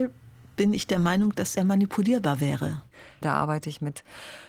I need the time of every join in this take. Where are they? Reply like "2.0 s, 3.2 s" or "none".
1.6 s, 3.2 s